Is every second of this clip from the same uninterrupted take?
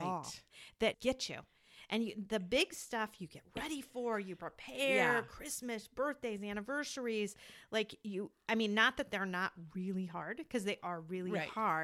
no; 1 cut; at 0.9 s

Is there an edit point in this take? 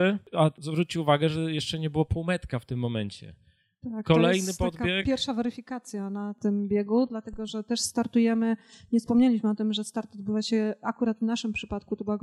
no; 0 cuts

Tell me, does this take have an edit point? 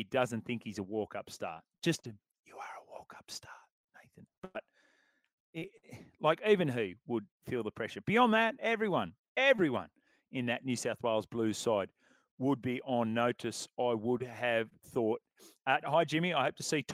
yes; 1 cut; at 15.8 s

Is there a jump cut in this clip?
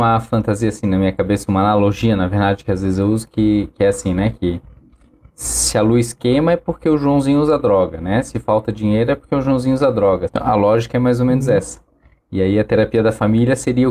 yes; 1 cut; at 10.3 s

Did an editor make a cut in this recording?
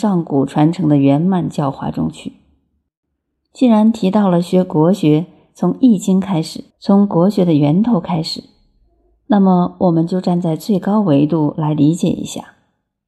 yes; 1 cut; at 6.7 s

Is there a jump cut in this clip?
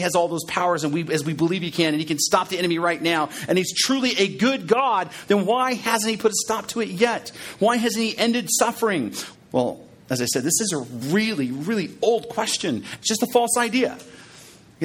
yes; 3 cuts; at 9.3 s, 11.0 s, 13.0 s

